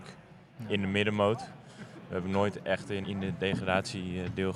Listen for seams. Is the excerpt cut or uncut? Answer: cut